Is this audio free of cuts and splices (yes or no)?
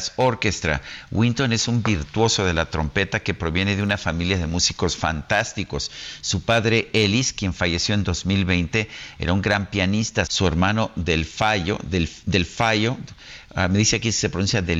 no